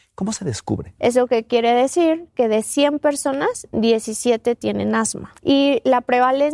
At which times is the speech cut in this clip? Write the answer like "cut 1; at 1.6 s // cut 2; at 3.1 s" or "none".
cut 1; at 1.0 s // cut 2; at 2.3 s // cut 3; at 5.4 s